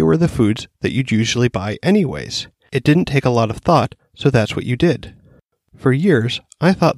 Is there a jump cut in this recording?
no; 0 cuts

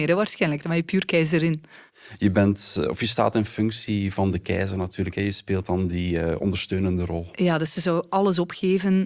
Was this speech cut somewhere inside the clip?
no; 0 cuts

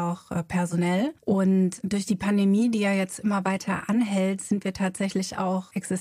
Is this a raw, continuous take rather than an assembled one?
no; 1 cut; at 1.2 s

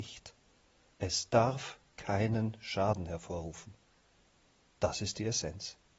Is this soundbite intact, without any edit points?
yes; 0 cuts

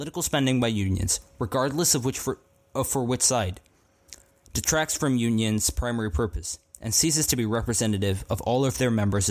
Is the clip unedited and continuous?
yes; 0 cuts

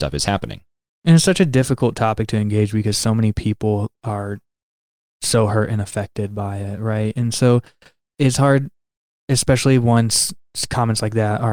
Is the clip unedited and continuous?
yes; 0 cuts

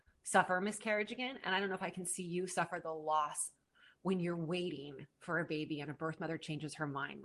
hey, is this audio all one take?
yes; 0 cuts

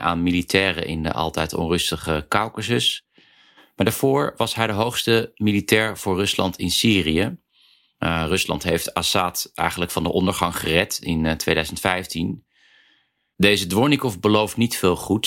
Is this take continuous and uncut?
yes; 0 cuts

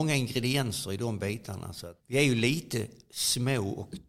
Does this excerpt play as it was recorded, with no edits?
no; 1 cut; at 2.0 s

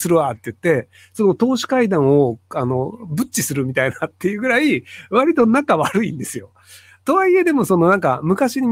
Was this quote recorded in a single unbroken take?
yes; 0 cuts

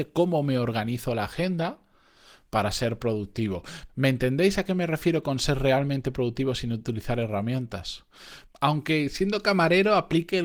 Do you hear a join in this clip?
yes; 2 cuts; at 3.9 s, 8.5 s

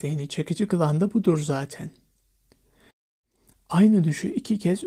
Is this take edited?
no; 0 cuts

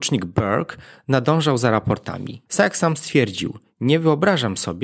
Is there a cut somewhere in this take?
yes; 1 cut; at 2.5 s

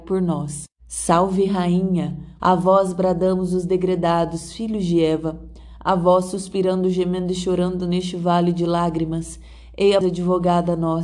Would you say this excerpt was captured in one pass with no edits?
no; 2 cuts; at 2.4 s, 10.0 s

